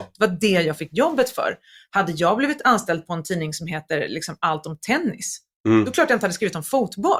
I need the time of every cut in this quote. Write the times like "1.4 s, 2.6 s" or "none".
none

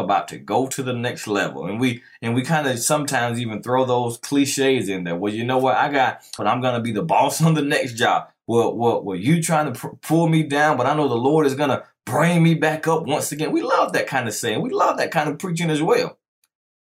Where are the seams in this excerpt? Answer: 6.4 s

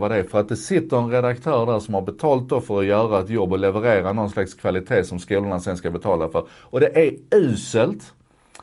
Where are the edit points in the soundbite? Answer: none

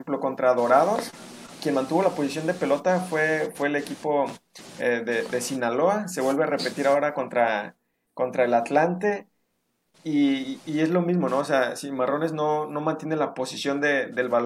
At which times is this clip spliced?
none

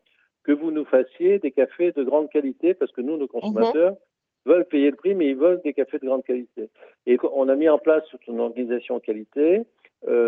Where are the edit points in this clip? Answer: 7.2 s

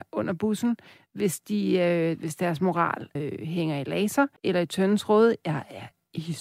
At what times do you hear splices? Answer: 3.2 s, 4.4 s

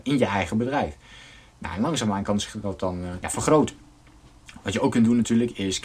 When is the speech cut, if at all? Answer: 3.2 s

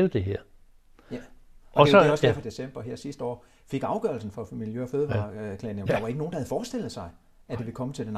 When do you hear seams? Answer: 2.4 s, 5.9 s

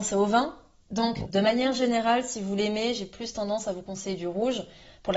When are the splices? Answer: 1.2 s

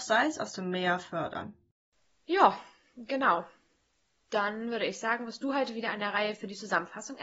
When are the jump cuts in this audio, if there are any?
none

